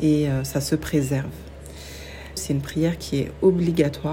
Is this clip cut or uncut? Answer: cut